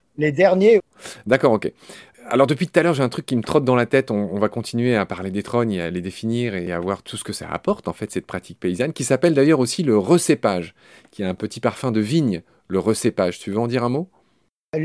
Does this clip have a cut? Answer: no; 0 cuts

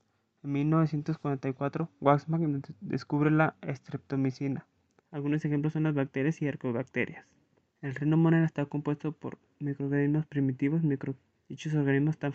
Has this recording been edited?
yes; 3 cuts; at 5.0 s, 7.7 s, 11.4 s

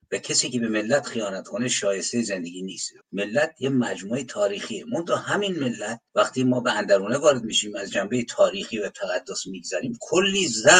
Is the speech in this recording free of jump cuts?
no; 2 cuts; at 3.0 s, 6.1 s

